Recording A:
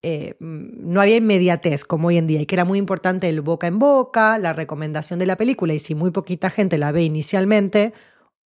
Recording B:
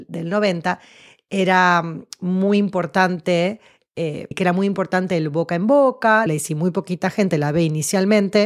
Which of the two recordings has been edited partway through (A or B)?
B